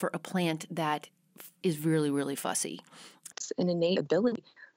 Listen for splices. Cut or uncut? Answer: cut